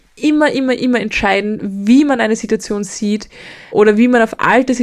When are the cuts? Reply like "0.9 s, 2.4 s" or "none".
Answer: none